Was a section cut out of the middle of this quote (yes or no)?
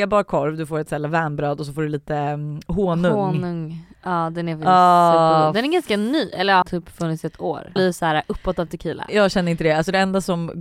yes